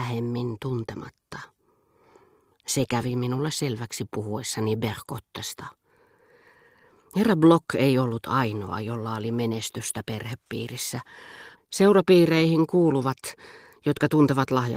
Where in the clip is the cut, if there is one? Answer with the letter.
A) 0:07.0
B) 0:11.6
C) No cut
B